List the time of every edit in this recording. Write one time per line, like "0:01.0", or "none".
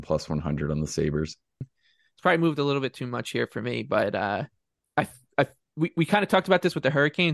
0:01.6